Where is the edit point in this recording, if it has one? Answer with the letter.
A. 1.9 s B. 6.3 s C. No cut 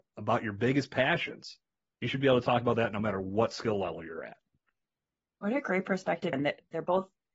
B